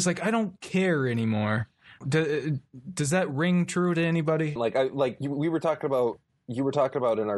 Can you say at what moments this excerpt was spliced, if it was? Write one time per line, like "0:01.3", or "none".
0:02.0
0:04.6